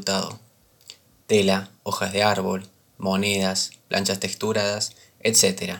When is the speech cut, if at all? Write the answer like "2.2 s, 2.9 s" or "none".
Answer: 1.2 s